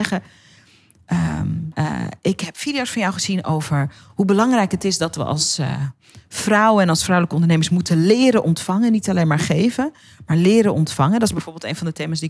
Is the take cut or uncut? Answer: cut